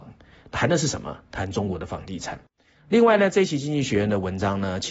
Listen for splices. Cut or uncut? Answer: cut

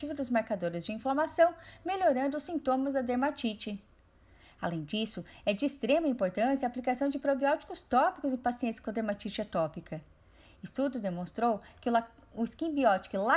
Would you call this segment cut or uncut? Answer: uncut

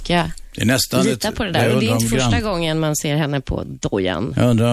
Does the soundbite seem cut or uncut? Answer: uncut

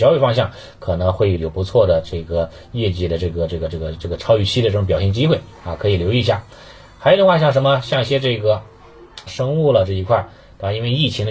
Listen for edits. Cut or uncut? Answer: cut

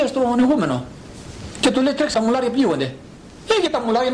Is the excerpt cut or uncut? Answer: cut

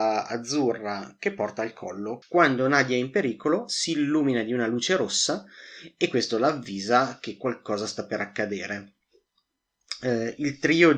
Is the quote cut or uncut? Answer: cut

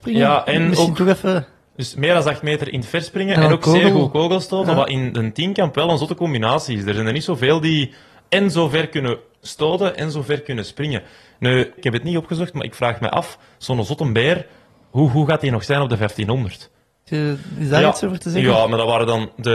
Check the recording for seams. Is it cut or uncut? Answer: cut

